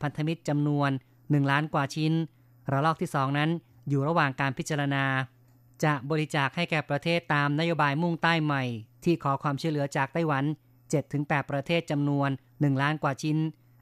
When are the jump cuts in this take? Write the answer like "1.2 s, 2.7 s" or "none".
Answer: none